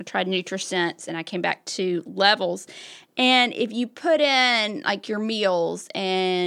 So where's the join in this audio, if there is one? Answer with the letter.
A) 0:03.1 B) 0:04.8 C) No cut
C